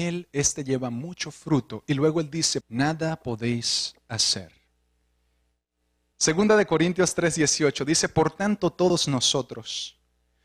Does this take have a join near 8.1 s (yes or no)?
no